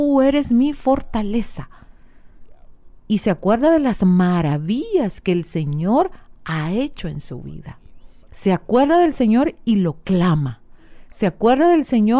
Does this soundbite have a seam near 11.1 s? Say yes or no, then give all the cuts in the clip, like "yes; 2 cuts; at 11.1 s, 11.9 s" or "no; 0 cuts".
no; 1 cut; at 8.2 s